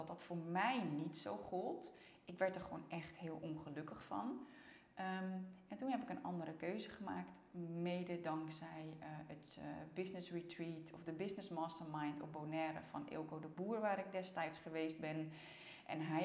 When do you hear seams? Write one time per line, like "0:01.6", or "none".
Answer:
none

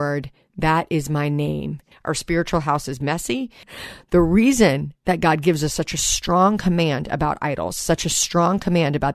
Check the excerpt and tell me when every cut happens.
0:01.9
0:03.6

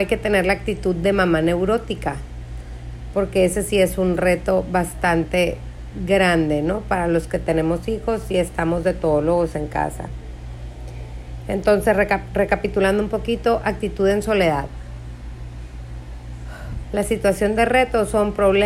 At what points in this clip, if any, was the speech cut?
0:16.8

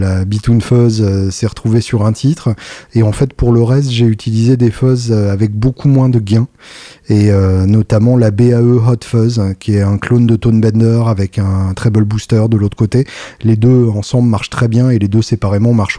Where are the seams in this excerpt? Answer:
none

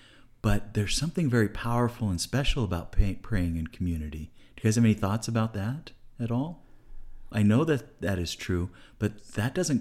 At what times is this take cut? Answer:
0:07.3

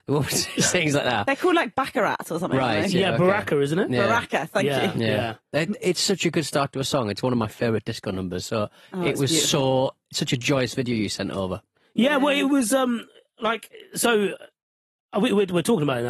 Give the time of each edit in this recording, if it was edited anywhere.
none

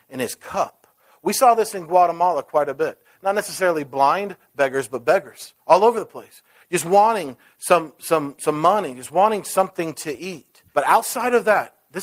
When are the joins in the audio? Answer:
0:10.7

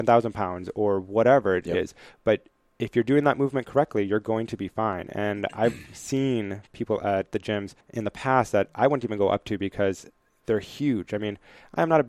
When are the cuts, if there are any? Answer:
0:07.8

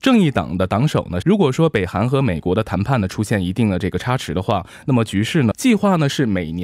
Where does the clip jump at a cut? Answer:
0:01.2
0:05.5

